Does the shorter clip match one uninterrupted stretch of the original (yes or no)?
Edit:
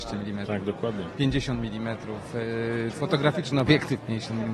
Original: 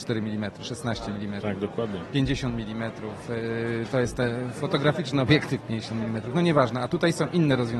no